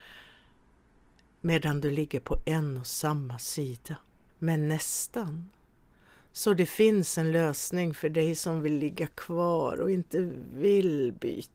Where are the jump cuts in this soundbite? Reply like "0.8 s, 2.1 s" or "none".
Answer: 4.3 s